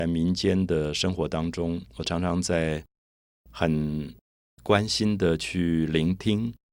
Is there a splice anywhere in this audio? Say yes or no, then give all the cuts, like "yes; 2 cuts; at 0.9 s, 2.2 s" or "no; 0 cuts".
no; 0 cuts